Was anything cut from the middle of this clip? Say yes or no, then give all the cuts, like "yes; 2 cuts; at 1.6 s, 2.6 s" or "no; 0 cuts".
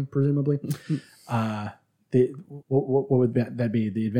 yes; 1 cut; at 2.6 s